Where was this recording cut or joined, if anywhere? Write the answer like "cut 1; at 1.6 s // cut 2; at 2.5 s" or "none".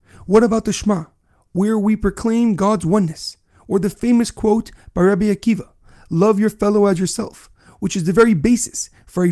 none